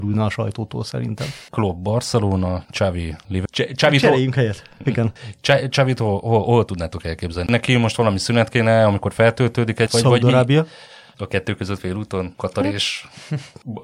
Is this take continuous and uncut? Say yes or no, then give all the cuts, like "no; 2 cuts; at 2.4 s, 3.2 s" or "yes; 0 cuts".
no; 1 cut; at 3.5 s